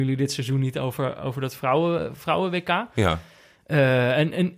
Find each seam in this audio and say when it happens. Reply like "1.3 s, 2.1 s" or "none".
none